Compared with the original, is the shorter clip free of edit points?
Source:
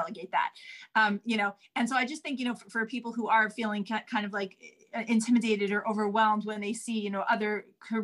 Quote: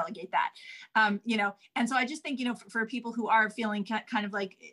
yes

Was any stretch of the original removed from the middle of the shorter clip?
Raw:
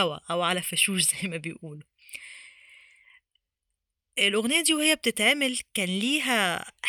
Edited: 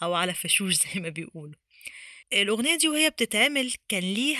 yes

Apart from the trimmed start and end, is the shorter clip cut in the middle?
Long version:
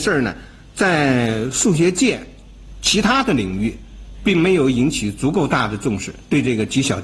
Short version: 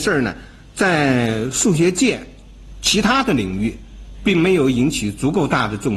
no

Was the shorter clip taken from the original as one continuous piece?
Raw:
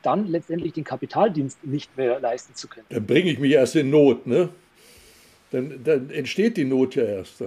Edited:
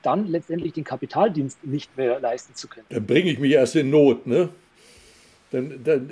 yes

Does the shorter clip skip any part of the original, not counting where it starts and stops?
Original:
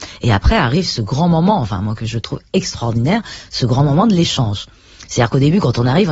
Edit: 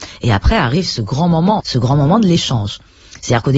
yes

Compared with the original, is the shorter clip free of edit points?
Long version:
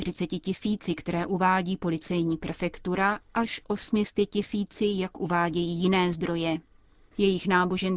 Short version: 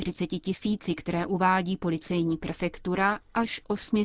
yes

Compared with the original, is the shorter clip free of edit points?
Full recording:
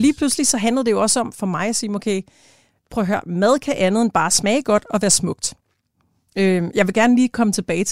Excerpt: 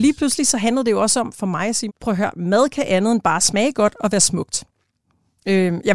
no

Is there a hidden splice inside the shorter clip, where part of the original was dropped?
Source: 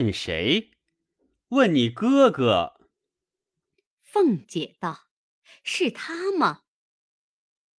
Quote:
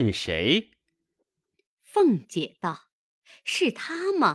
yes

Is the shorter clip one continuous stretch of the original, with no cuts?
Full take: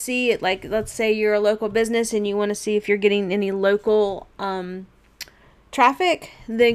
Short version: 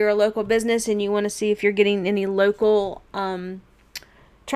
yes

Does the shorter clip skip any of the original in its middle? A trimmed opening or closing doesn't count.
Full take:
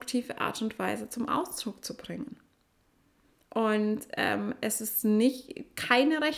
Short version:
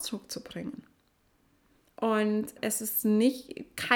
yes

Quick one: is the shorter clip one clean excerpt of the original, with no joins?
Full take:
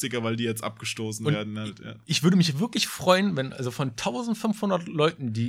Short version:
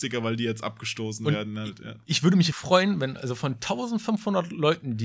no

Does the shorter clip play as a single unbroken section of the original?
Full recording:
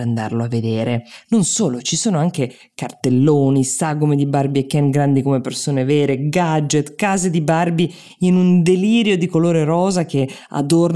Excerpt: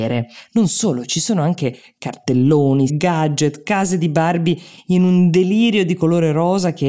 no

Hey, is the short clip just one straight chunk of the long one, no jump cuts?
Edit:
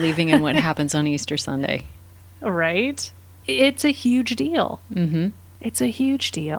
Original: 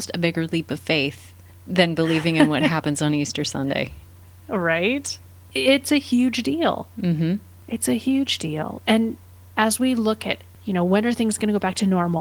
yes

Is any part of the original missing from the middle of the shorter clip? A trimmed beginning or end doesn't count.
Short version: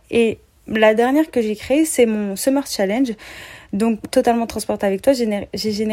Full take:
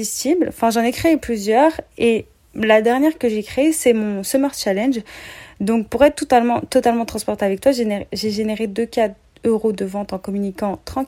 yes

